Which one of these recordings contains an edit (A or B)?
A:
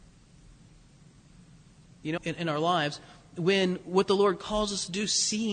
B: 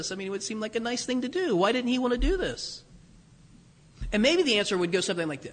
A